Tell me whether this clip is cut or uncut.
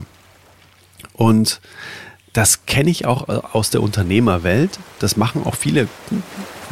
uncut